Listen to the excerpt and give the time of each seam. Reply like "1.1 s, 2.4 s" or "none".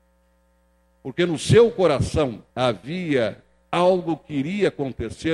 2.5 s